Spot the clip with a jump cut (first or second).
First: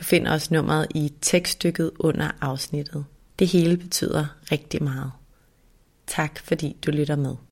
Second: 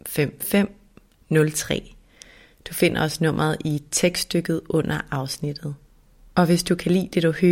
first